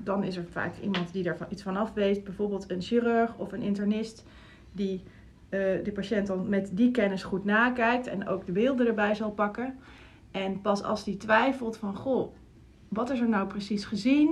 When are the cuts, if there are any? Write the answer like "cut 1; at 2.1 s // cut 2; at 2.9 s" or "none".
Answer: none